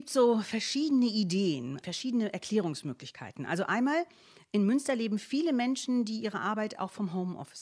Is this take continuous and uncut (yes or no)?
yes